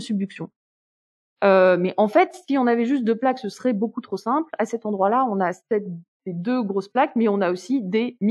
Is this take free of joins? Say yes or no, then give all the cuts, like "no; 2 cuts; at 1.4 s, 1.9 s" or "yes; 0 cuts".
yes; 0 cuts